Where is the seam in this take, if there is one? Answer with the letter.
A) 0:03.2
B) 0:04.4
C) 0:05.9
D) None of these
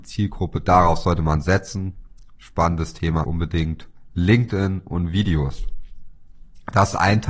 A